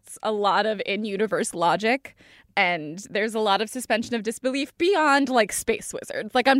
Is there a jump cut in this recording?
no; 0 cuts

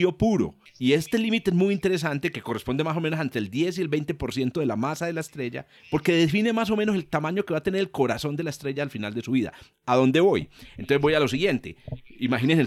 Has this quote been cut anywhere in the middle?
no; 0 cuts

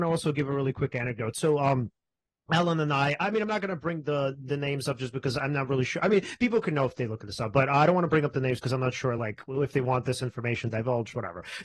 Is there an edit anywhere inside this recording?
no; 0 cuts

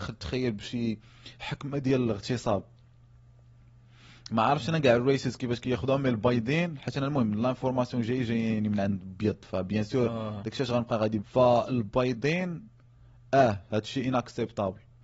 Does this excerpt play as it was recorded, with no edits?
no; 1 cut; at 11.2 s

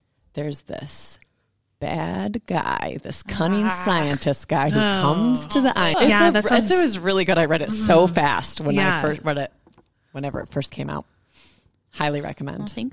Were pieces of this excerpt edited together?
yes; 1 cut; at 5.9 s

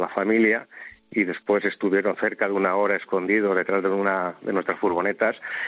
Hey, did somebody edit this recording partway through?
no; 0 cuts

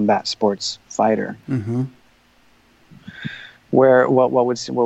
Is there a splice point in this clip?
no; 0 cuts

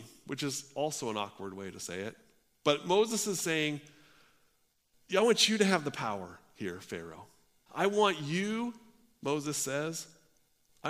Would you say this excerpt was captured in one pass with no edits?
no; 1 cut; at 7.7 s

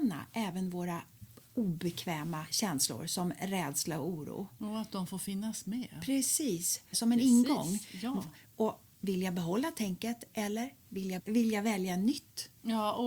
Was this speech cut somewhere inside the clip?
yes; 3 cuts; at 6.9 s, 8.5 s, 11.2 s

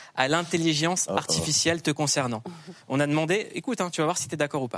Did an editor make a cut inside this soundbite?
no; 0 cuts

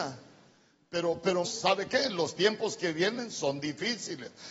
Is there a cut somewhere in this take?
yes; 1 cut; at 1.4 s

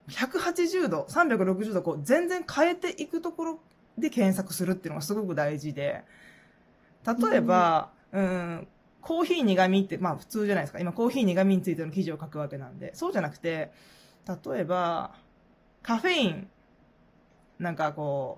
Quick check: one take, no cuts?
no; 1 cut; at 8.0 s

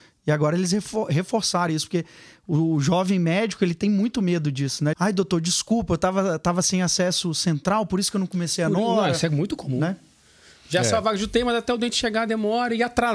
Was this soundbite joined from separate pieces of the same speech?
yes; 1 cut; at 4.9 s

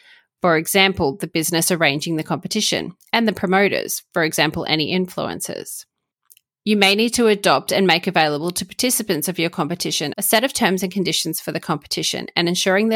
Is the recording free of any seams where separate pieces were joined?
no; 1 cut; at 6.5 s

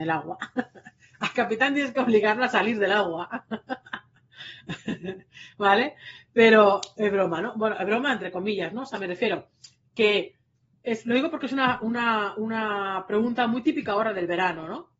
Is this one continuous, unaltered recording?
yes; 0 cuts

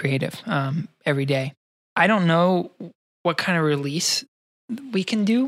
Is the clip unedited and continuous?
yes; 0 cuts

